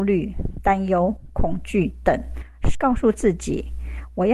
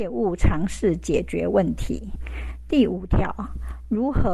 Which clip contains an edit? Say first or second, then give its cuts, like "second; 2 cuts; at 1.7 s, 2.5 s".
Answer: first; 1 cut; at 2.7 s